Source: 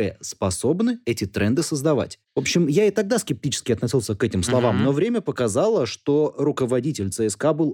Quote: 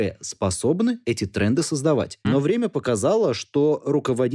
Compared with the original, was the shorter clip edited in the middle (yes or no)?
yes